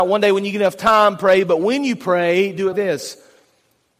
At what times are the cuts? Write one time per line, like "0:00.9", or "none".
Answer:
0:02.7